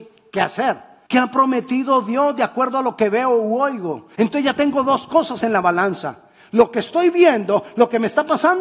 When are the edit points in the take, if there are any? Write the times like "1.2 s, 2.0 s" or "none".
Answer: 1.1 s, 4.1 s